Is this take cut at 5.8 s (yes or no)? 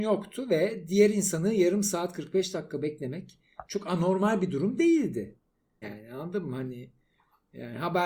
yes